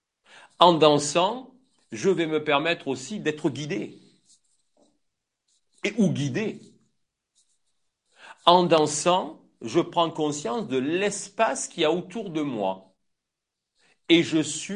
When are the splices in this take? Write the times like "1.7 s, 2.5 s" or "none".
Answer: none